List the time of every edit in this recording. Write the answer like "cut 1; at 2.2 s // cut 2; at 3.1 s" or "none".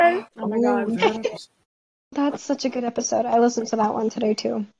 cut 1; at 1.4 s